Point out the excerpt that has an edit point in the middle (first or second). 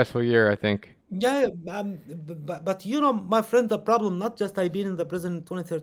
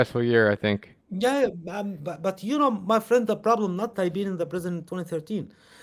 second